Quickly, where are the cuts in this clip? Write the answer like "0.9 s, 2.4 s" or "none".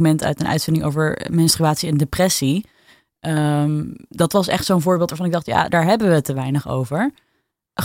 5.7 s

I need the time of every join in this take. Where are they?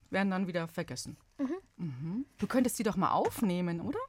2.4 s

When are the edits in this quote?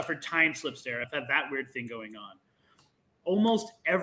1.0 s

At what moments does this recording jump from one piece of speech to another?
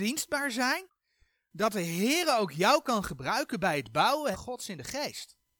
4.3 s

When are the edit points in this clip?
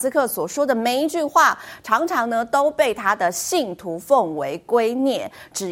none

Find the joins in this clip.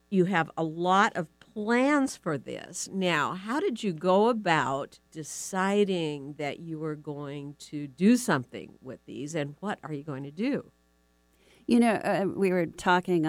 5.1 s

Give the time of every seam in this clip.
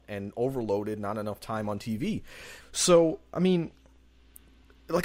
2.6 s

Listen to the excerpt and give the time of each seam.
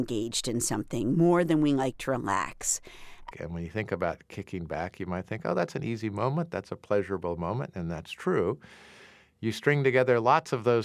3.3 s

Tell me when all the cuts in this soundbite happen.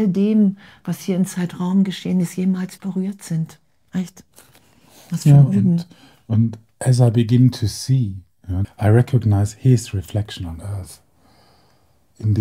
2.8 s, 8.6 s

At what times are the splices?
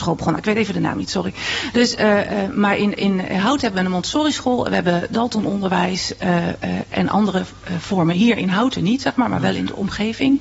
none

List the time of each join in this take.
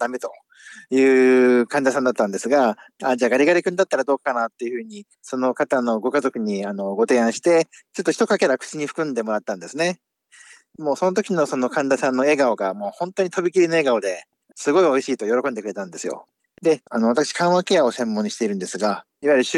none

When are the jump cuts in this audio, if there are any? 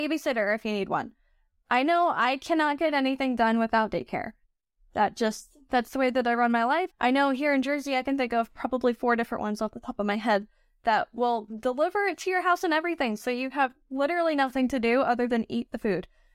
6.9 s

